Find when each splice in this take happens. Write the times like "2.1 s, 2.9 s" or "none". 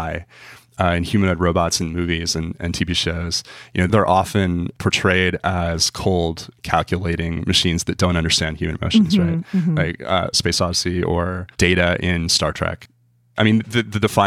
10.3 s, 11.5 s